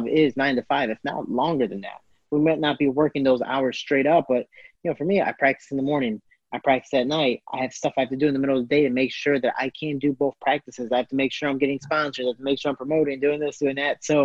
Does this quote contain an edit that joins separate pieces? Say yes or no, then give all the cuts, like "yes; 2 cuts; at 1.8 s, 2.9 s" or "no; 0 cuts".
no; 0 cuts